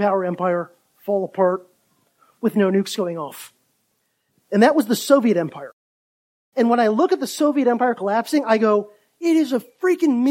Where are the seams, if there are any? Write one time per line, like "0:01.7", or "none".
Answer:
0:04.3